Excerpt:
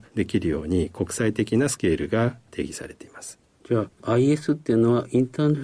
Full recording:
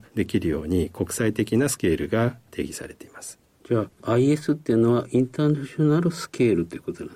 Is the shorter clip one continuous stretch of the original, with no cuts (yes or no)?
yes